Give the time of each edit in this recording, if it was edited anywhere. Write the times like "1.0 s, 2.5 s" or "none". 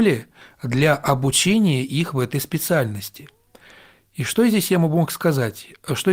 none